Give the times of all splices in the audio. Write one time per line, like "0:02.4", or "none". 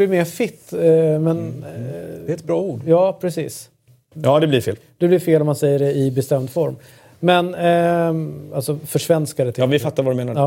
0:04.1